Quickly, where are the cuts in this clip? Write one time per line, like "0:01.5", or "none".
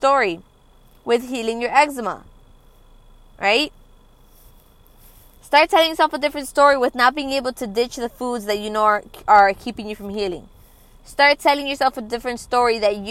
none